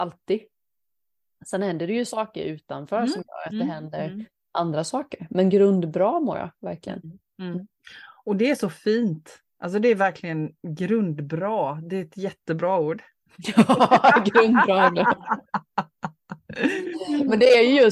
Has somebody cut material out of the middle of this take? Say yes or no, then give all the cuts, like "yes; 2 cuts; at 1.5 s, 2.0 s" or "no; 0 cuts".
no; 0 cuts